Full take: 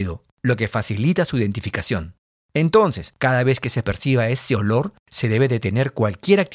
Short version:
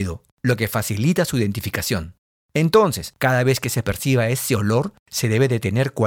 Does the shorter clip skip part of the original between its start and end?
no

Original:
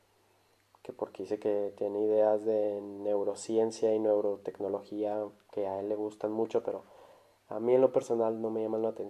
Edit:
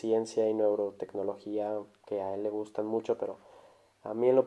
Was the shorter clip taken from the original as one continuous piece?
yes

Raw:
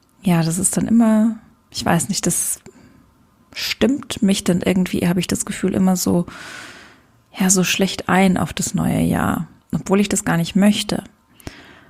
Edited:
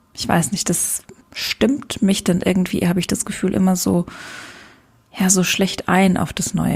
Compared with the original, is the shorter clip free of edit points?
no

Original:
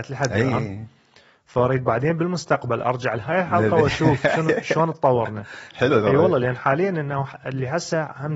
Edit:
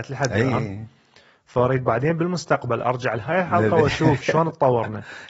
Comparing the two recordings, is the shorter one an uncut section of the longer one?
no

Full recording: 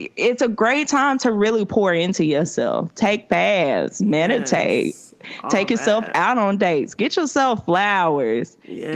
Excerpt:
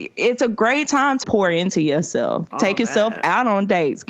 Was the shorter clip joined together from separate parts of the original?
yes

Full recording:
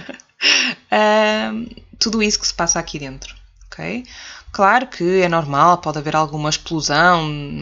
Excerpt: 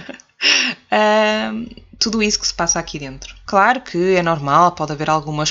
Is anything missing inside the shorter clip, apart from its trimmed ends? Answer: yes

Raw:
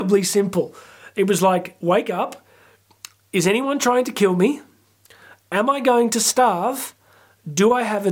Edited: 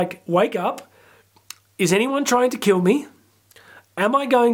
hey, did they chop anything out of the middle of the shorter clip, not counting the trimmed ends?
no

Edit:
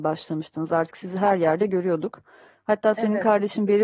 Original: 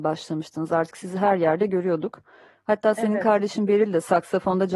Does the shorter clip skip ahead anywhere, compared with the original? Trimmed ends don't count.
no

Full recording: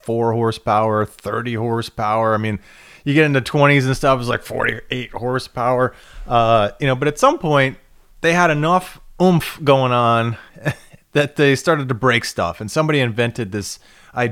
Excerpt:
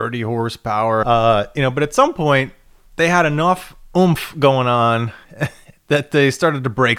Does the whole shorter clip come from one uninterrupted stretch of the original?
no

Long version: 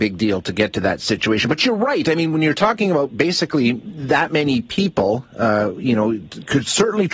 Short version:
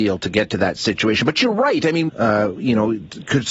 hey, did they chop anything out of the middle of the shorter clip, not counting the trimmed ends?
yes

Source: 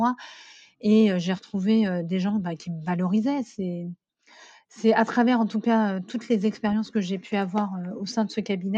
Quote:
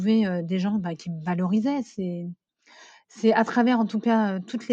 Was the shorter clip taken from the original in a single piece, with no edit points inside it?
yes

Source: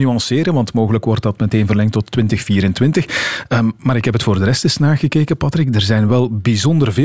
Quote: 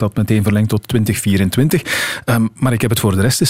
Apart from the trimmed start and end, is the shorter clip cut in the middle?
no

